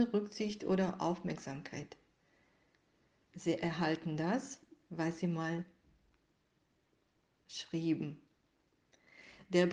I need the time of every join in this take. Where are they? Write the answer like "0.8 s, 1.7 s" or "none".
none